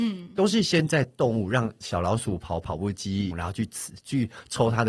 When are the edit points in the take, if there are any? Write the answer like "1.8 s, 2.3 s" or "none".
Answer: 3.3 s

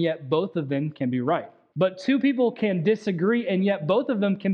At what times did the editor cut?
1.7 s

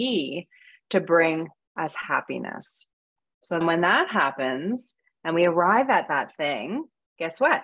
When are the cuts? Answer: 3.6 s

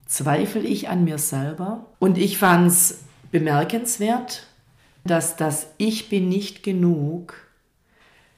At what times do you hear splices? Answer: 1.9 s, 5.1 s

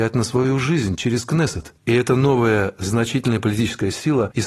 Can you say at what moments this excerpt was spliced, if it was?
1.8 s

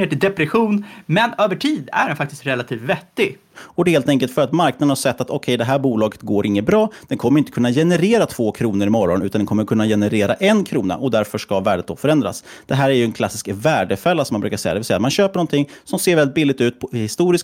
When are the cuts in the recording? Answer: 3.5 s

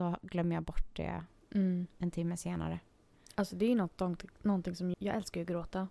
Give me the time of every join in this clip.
4.9 s

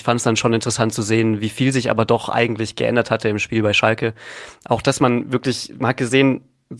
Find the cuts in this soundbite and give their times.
none

